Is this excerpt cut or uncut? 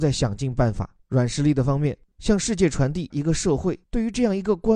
cut